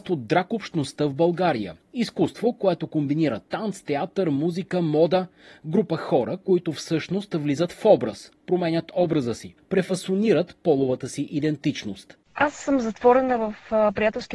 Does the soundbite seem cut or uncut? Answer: cut